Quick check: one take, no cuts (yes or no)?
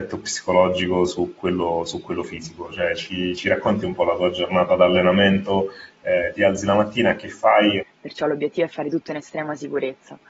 no